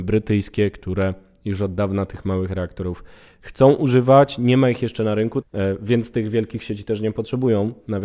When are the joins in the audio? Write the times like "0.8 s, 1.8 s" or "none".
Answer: 5.4 s